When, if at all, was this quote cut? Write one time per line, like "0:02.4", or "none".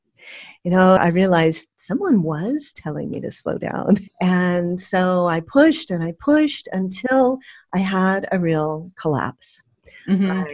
0:01.0
0:04.1